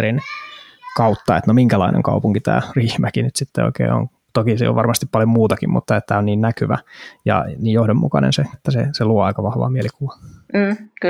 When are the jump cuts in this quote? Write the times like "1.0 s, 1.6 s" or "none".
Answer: 8.5 s